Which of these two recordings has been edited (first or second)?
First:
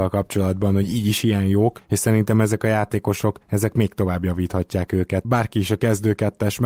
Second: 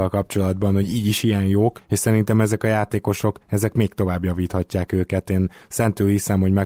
first